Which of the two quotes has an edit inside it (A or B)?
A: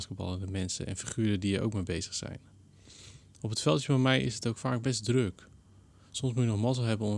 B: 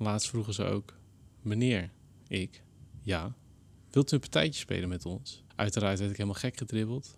B